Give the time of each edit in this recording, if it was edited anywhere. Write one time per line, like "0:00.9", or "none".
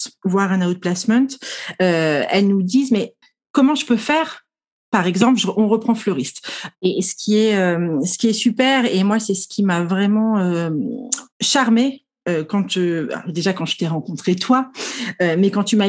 0:06.7
0:11.3